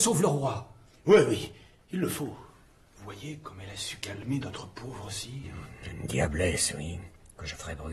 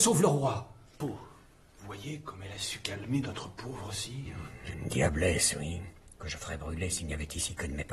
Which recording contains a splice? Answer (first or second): second